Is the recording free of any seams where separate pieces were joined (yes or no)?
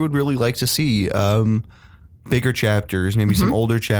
yes